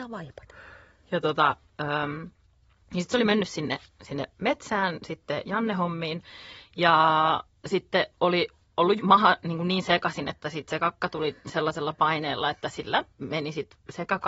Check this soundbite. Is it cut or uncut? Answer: cut